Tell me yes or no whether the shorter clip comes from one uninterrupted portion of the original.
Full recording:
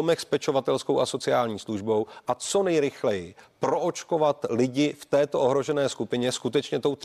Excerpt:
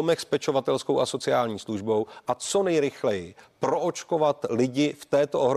yes